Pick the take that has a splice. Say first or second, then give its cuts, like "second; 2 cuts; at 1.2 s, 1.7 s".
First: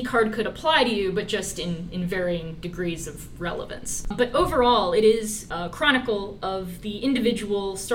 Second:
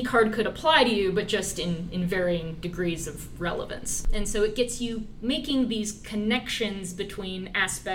first; 2 cuts; at 4.1 s, 5.5 s